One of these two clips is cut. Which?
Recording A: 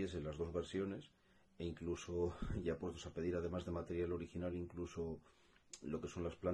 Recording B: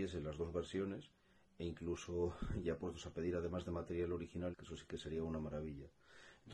B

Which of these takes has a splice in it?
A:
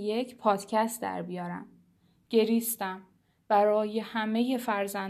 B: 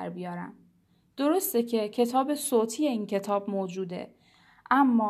A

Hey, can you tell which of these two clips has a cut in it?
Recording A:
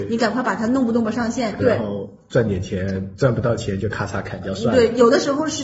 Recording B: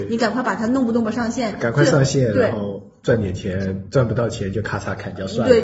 A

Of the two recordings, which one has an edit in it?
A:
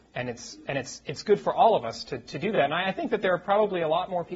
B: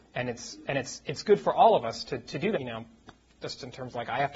B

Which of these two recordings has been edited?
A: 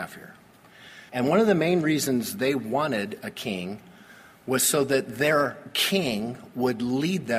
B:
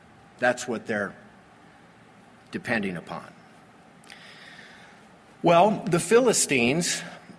A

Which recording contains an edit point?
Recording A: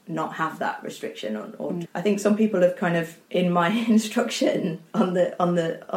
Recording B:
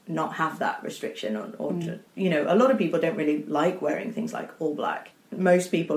A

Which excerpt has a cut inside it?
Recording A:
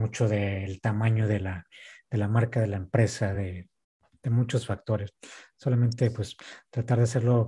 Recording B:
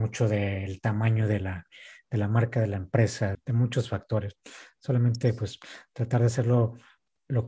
B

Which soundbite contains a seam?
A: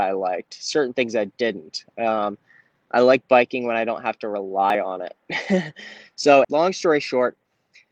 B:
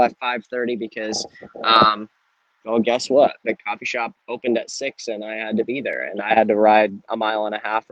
A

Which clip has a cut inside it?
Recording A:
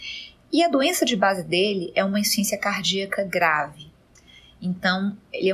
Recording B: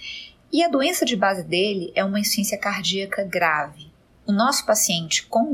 B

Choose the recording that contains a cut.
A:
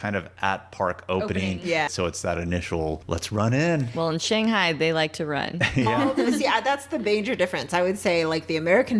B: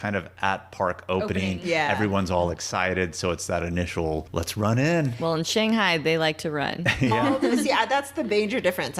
A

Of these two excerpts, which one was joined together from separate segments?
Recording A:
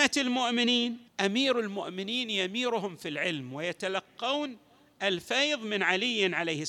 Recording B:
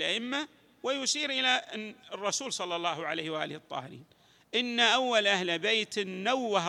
A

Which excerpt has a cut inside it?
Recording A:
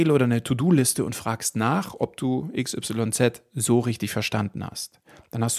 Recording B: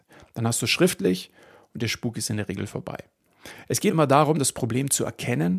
B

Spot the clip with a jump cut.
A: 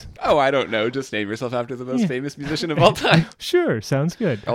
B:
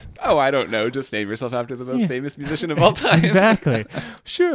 A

